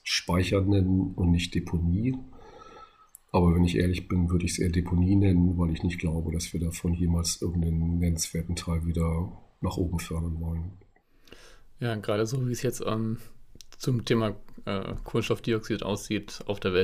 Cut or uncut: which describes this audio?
uncut